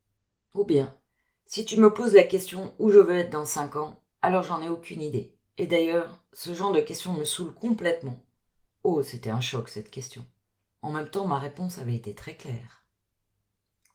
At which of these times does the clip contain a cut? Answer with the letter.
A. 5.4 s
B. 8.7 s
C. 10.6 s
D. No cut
B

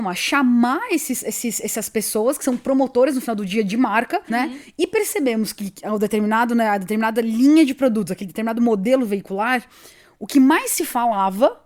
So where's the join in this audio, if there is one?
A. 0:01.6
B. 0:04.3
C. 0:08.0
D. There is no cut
B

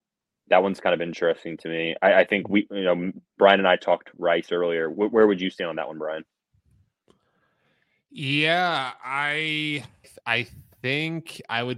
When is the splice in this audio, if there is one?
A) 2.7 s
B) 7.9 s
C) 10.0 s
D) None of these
C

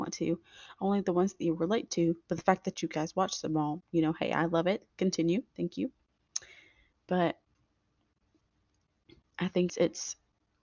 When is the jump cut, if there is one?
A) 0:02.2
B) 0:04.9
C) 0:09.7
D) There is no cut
C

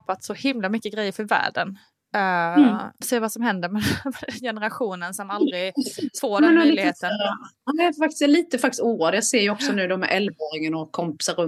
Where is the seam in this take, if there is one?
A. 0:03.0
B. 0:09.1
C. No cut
A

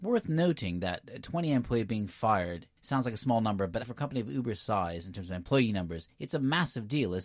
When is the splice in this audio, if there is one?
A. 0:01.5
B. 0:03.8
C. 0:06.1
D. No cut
B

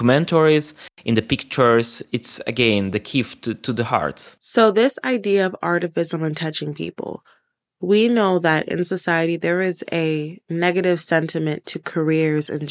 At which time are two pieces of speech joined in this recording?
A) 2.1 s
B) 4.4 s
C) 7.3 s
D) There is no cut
D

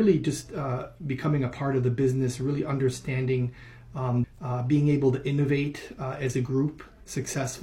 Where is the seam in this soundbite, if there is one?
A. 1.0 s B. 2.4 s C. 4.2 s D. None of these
C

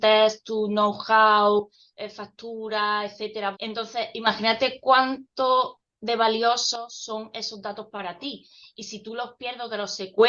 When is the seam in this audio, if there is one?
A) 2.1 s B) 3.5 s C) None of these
B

